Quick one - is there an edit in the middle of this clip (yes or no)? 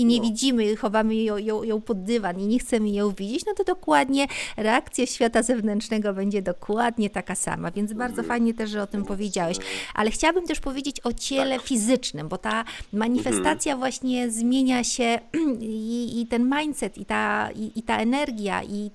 no